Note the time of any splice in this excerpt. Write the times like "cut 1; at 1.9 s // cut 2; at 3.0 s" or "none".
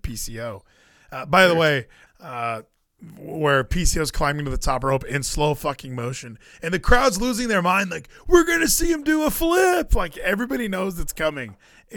cut 1; at 2.1 s